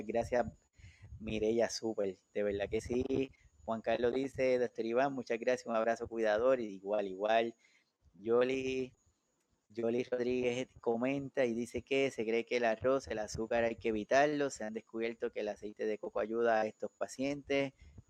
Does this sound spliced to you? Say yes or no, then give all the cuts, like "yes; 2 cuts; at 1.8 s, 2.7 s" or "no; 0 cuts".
no; 0 cuts